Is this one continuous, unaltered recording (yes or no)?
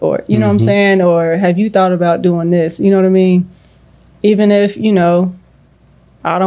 yes